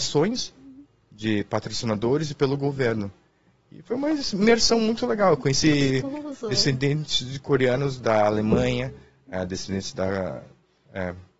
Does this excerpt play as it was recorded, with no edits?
yes; 0 cuts

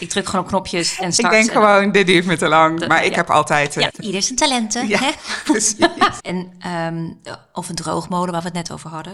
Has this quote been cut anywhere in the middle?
yes; 2 cuts; at 3.9 s, 6.2 s

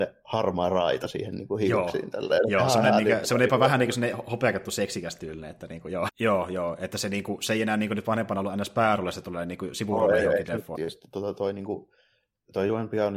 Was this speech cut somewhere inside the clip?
yes; 2 cuts; at 6.1 s, 10.7 s

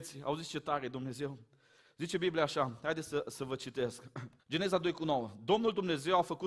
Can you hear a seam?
yes; 1 cut; at 4.4 s

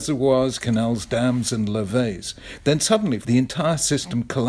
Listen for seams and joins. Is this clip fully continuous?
no; 1 cut; at 3.2 s

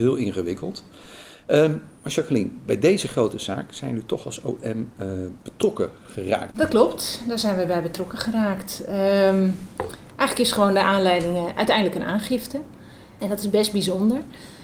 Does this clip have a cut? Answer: yes; 2 cuts; at 6.5 s, 13.2 s

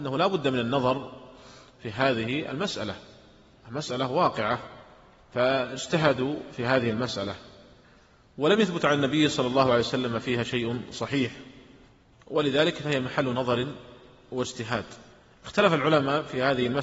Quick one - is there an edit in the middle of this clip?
no; 0 cuts

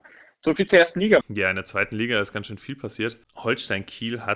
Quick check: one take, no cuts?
no; 1 cut; at 1.2 s

